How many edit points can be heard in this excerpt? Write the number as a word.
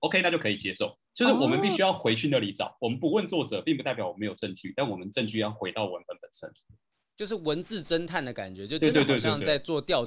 one